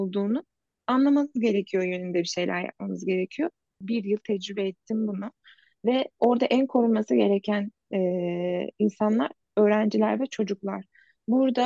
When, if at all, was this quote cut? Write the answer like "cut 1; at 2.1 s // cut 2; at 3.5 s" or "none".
cut 1; at 3.8 s